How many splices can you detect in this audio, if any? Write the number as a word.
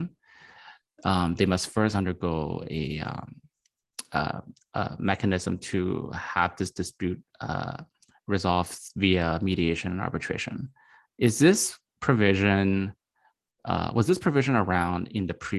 zero